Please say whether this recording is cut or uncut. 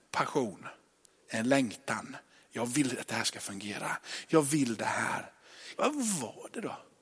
cut